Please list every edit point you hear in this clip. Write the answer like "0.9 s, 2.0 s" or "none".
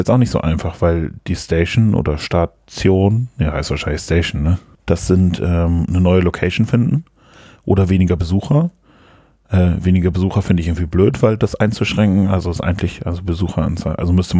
4.7 s